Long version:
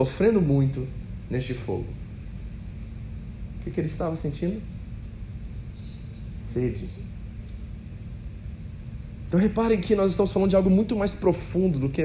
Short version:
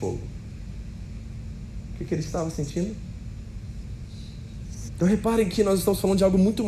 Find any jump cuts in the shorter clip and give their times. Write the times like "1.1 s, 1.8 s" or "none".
4.9 s